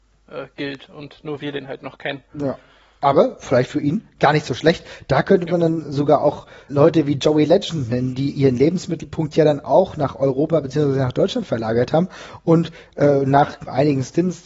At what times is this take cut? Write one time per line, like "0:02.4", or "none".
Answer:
none

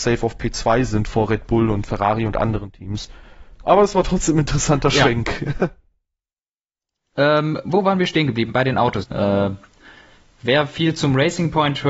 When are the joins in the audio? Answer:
0:03.6
0:09.0

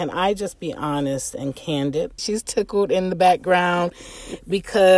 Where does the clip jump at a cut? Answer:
0:02.2

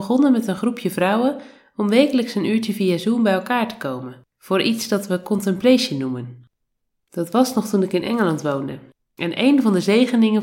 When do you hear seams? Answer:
0:04.3

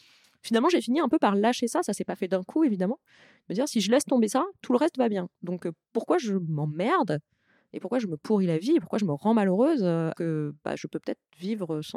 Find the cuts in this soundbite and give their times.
0:10.1

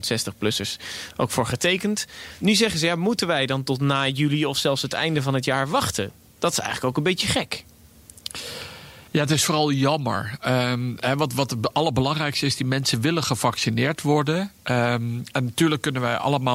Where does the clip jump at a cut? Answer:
0:09.1

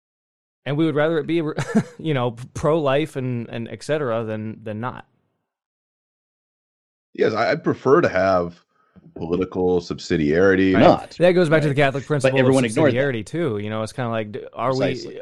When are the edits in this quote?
0:10.7

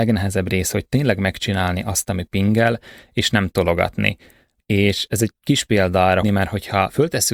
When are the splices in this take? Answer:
0:04.6
0:06.2

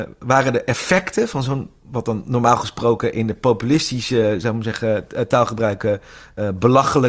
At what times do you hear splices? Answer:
none

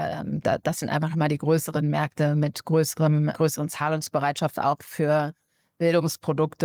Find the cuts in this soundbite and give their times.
0:03.3

